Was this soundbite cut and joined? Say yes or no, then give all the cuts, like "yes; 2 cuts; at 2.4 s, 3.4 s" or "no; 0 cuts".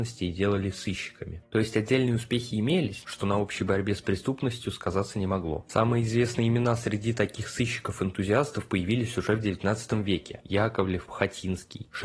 yes; 2 cuts; at 3.0 s, 11.1 s